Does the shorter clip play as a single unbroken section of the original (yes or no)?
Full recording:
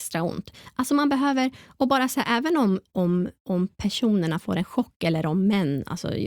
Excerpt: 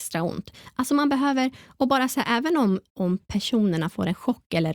no